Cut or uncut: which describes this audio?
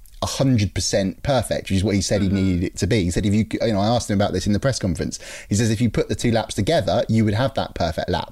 uncut